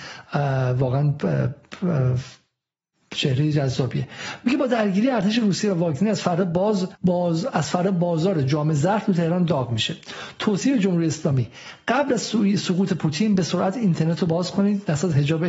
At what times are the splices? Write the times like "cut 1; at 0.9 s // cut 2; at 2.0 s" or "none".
cut 1; at 7.0 s